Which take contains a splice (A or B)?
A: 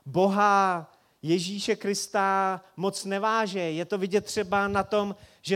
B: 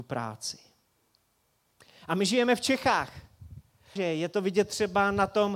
B